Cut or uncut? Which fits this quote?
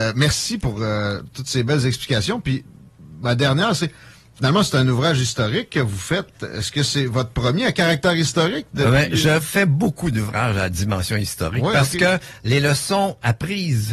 uncut